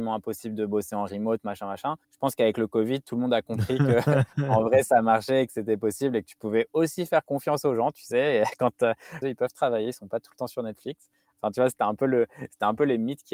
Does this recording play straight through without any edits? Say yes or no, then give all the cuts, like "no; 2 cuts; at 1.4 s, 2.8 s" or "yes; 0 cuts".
no; 2 cuts; at 2.0 s, 9.2 s